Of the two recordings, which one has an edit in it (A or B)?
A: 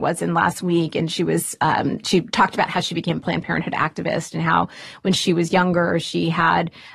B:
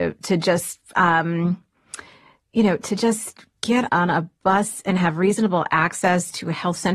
B